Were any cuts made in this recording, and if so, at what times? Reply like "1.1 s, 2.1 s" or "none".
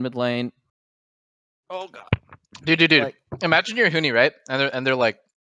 none